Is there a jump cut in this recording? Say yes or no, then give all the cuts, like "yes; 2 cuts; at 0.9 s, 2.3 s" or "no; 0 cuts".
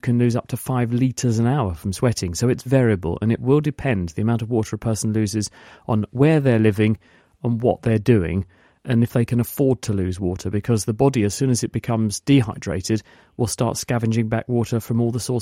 yes; 1 cut; at 2.7 s